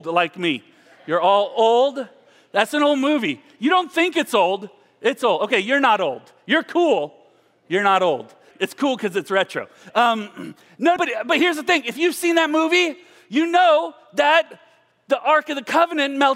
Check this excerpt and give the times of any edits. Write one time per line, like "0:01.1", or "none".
0:08.5
0:09.9
0:11.0